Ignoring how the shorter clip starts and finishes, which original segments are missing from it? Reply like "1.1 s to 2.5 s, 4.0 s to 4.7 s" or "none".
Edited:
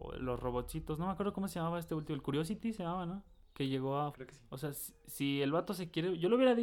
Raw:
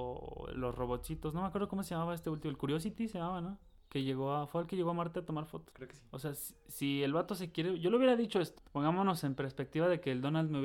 4.5 s to 5.7 s